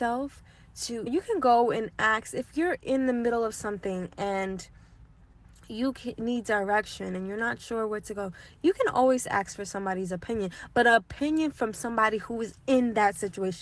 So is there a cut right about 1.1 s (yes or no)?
yes